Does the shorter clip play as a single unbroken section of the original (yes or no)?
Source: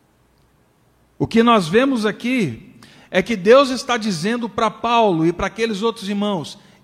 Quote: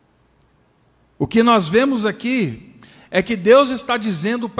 yes